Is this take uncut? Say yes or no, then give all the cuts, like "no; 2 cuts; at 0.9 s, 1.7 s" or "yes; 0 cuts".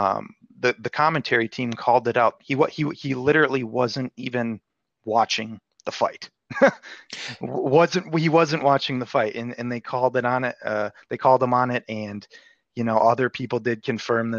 no; 1 cut; at 2.4 s